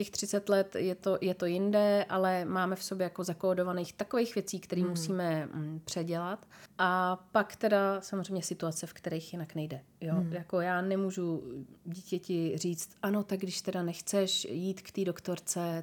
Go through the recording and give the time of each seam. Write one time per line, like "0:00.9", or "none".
none